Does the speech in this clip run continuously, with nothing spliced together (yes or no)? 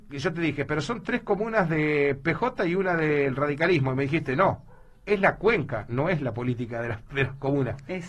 yes